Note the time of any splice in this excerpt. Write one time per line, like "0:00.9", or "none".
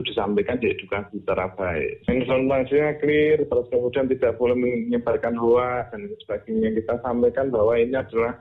none

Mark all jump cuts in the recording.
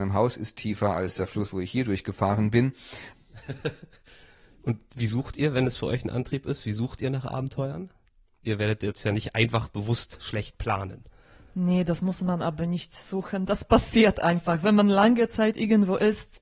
0:03.1

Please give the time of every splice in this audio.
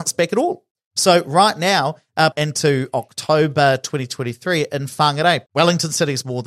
0:02.3
0:05.5

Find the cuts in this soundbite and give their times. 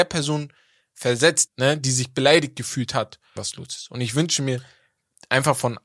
0:01.5
0:03.4

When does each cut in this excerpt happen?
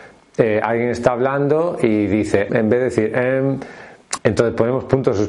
0:02.5
0:04.2

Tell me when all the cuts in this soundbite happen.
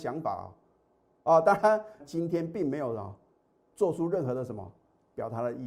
0:02.0

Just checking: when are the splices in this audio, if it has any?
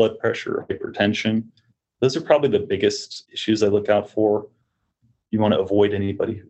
none

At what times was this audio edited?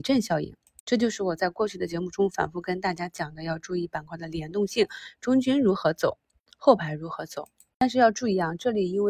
none

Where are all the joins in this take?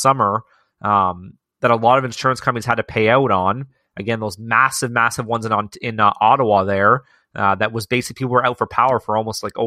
none

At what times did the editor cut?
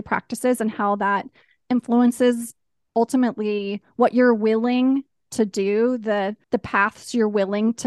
0:06.4

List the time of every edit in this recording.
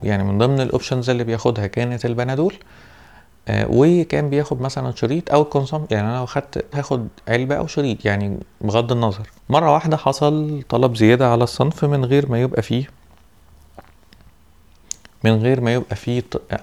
0:06.7
0:09.4

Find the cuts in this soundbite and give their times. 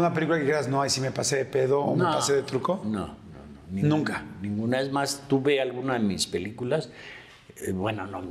none

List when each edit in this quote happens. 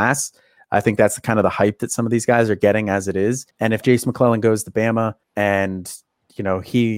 0:03.5
0:05.2

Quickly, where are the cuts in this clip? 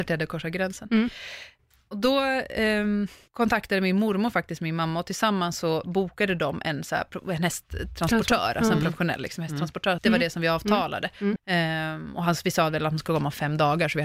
0:10.0
0:11.4

